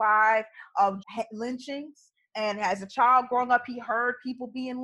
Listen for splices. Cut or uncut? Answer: cut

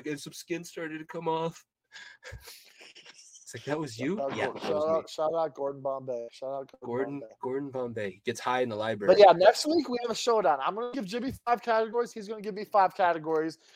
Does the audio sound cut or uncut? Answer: uncut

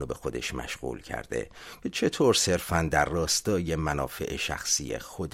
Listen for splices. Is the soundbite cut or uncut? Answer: uncut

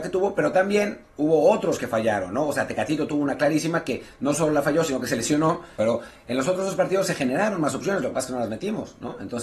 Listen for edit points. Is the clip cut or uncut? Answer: cut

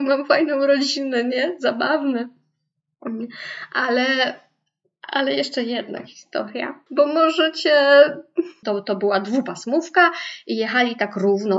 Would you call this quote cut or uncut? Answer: cut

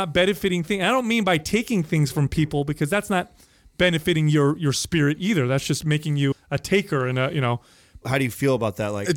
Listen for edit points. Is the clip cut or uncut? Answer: cut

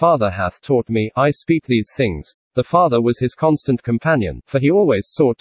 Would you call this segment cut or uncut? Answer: cut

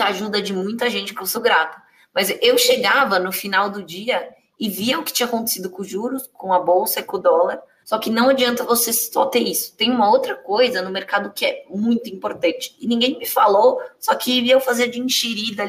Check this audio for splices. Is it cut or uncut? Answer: cut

